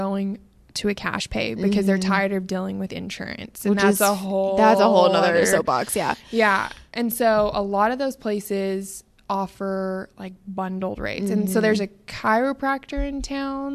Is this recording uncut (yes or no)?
yes